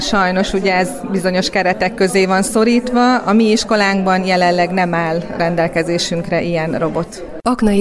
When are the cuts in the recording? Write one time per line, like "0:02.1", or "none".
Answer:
none